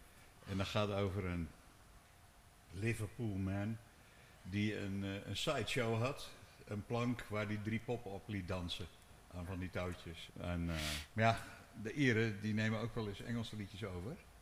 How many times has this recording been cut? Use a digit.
1